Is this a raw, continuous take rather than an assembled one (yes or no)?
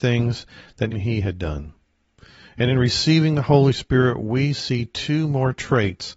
no